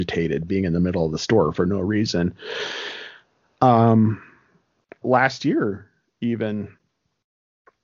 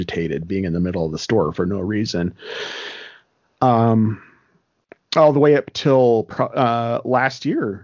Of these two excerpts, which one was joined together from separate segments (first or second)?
first